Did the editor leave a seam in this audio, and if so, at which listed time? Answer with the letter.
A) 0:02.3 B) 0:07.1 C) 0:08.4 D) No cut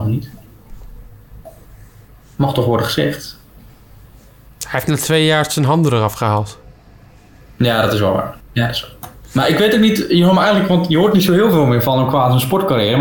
C